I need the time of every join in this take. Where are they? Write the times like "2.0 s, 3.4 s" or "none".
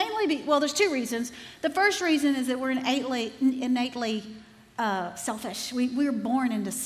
none